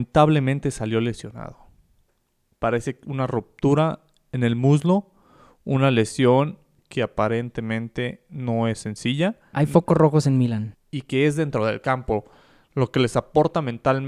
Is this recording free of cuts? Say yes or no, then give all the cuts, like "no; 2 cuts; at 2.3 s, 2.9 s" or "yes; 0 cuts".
no; 2 cuts; at 9.5 s, 10.7 s